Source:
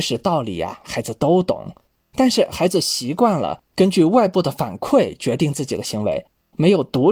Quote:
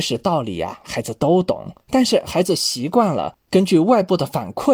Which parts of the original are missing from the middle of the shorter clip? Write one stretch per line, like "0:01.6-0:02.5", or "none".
0:01.8-0:02.1